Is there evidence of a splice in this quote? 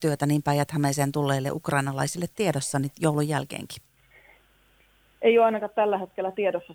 no; 0 cuts

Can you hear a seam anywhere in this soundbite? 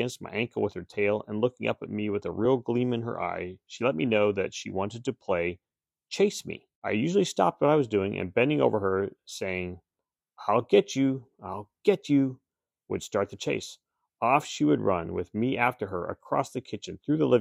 yes; 1 cut; at 6.7 s

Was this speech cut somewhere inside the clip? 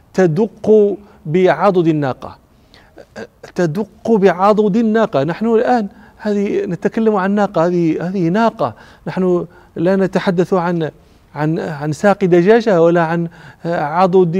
no; 0 cuts

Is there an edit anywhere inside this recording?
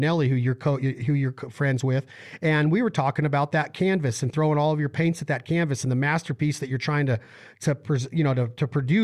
no; 0 cuts

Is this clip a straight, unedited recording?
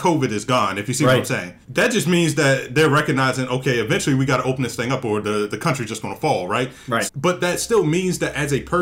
no; 2 cuts; at 1.6 s, 7.1 s

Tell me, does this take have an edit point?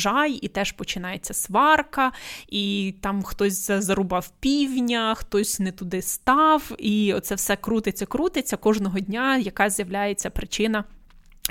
no; 0 cuts

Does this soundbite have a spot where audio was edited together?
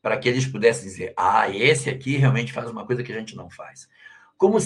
no; 0 cuts

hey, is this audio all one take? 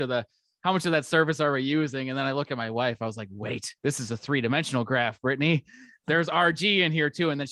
no; 2 cuts; at 3.8 s, 6.0 s

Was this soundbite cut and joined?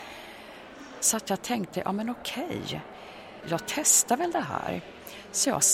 yes; 2 cuts; at 1.0 s, 3.4 s

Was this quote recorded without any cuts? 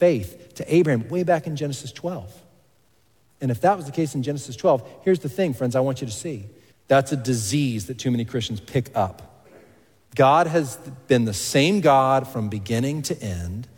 no; 1 cut; at 6.7 s

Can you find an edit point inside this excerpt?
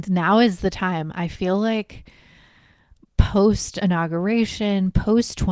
no; 0 cuts

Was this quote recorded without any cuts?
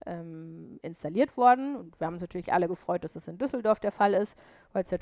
yes; 0 cuts

